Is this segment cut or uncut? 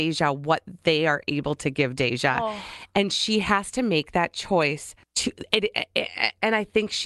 cut